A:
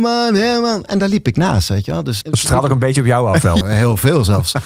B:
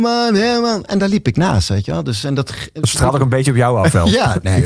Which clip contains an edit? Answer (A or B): A